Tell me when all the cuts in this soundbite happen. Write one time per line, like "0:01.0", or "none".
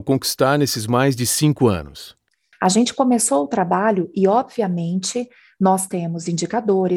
0:02.5